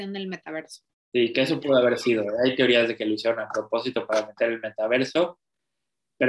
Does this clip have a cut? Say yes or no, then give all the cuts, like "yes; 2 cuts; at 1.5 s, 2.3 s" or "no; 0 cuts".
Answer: no; 0 cuts